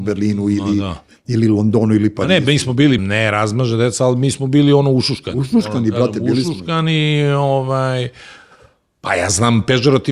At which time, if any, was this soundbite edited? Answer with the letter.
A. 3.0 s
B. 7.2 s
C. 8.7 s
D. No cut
A